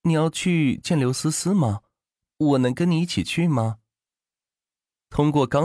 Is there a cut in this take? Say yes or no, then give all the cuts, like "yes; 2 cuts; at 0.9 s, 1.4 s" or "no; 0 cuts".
no; 0 cuts